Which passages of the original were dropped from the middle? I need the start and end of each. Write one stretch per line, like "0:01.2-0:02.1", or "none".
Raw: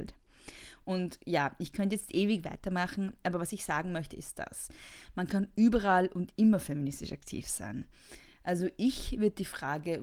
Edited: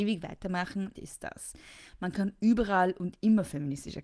0:03.2-0:04.1